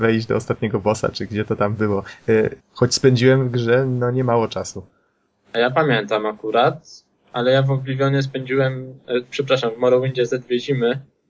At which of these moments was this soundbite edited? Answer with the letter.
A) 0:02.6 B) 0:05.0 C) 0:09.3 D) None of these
A